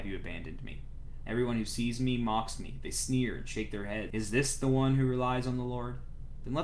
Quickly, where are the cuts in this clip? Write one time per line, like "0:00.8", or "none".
0:01.2
0:04.1